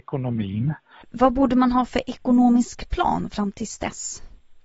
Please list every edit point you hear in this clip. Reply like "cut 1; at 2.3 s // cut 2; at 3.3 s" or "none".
cut 1; at 1.0 s